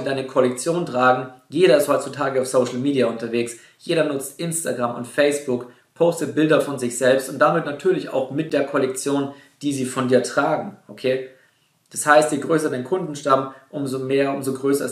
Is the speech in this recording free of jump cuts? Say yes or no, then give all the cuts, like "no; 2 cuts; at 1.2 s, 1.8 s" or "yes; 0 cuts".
yes; 0 cuts